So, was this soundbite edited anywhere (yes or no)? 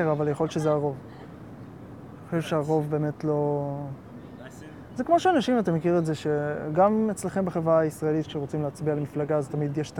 no